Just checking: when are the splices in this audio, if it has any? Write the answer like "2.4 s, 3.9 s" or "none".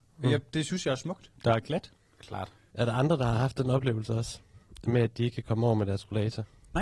1.4 s, 2.7 s